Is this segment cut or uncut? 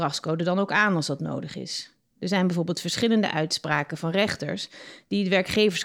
uncut